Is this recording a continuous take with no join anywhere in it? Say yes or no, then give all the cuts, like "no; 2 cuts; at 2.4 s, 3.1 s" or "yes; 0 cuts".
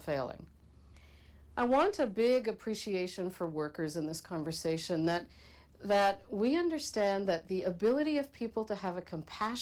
yes; 0 cuts